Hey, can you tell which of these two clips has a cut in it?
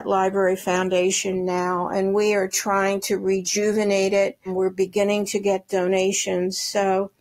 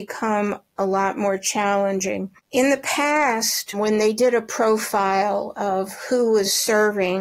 second; 1 cut; at 2.4 s

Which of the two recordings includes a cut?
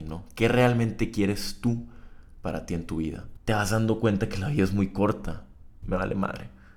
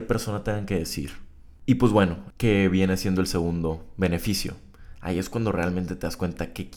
first; 2 cuts; at 3.4 s, 5.8 s

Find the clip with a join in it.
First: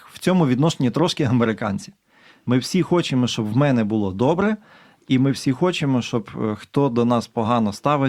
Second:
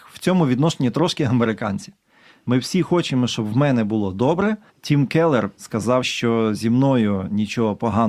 second; 2 cuts; at 4.7 s, 6.0 s

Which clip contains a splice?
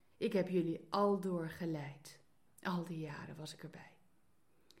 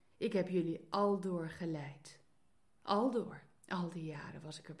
first; 1 cut; at 2.5 s

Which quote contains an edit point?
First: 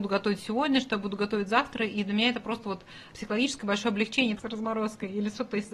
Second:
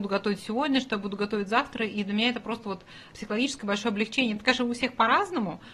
first; 1 cut; at 4.4 s

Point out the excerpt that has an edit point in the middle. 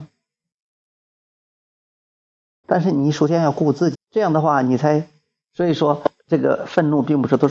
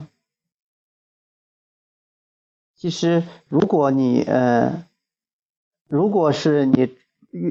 first; 3 cuts; at 2.6 s, 3.9 s, 5.4 s

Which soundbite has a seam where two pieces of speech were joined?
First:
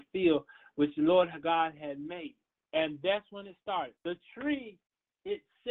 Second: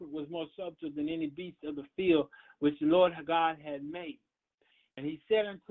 first; 2 cuts; at 2.6 s, 4.0 s

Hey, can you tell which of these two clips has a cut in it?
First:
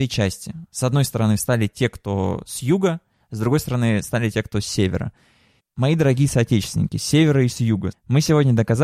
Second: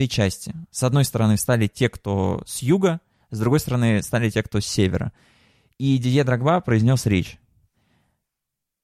first; 2 cuts; at 5.6 s, 7.9 s

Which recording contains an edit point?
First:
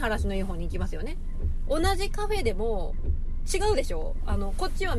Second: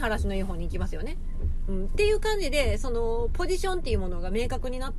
first; 1 cut; at 1.7 s

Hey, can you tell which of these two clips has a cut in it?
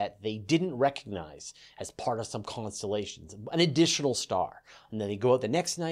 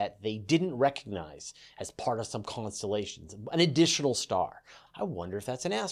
second; 1 cut; at 4.9 s

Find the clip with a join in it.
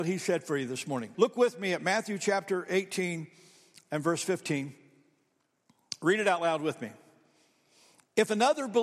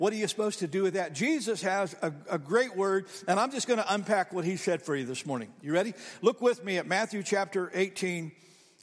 first; 1 cut; at 1.1 s

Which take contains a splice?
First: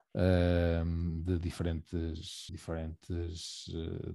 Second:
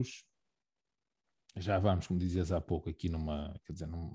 first; 1 cut; at 2.5 s

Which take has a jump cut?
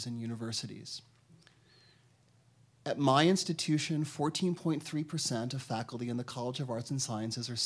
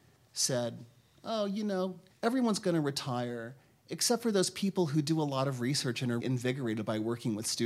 second; 2 cuts; at 2.1 s, 6.2 s

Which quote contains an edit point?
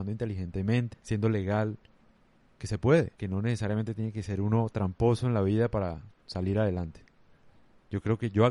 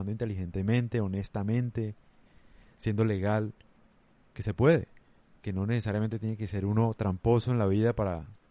first; 2 cuts; at 0.9 s, 3.1 s

